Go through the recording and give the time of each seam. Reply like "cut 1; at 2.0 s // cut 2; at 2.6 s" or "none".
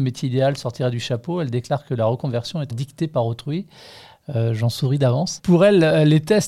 cut 1; at 2.7 s // cut 2; at 5.4 s